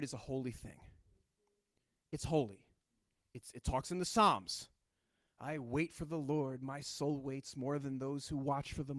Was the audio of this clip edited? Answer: no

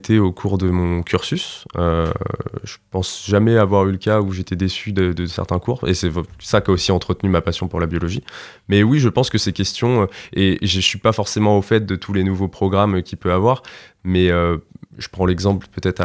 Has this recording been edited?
no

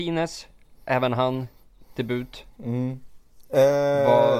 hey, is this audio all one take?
yes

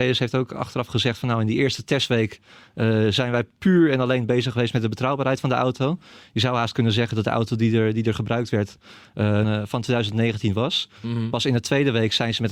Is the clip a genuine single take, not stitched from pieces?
no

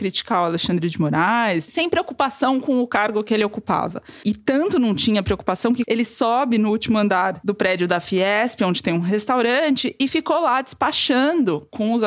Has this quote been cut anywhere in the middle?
yes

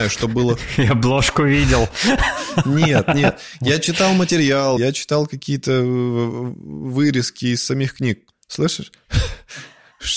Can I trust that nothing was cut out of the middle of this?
no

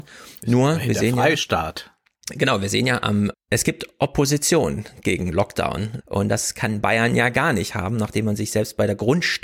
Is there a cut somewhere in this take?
yes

